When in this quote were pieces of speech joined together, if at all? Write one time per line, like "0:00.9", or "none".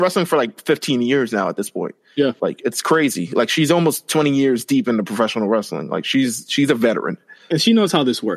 none